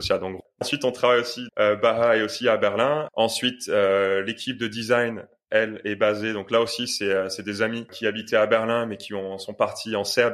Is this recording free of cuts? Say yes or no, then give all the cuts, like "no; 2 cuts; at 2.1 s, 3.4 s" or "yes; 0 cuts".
no; 2 cuts; at 1.5 s, 3.1 s